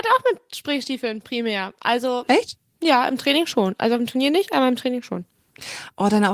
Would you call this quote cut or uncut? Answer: uncut